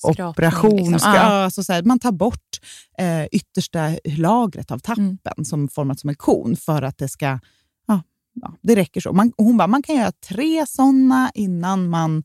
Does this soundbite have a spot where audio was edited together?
no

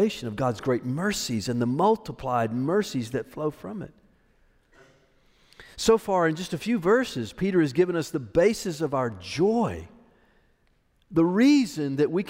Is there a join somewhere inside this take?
no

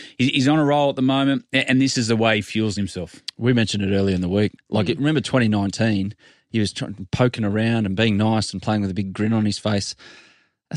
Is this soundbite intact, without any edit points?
no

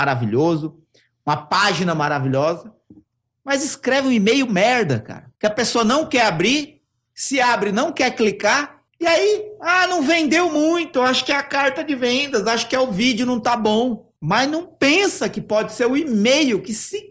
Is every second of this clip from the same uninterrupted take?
yes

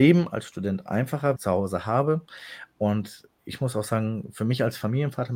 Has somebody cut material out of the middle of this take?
yes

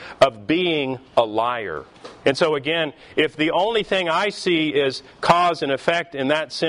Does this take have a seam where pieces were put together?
yes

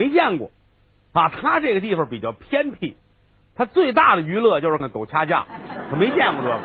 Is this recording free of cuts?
no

